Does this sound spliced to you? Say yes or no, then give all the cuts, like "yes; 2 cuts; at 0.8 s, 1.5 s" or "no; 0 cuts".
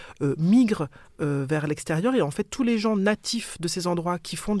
no; 0 cuts